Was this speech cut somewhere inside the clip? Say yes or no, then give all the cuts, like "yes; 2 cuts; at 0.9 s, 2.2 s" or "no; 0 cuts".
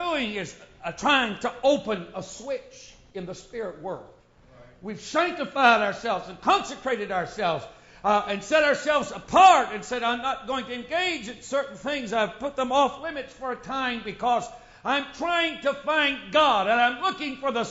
no; 0 cuts